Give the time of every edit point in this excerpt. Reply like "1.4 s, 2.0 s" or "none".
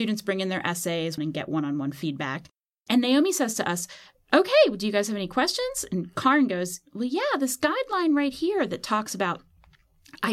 1.2 s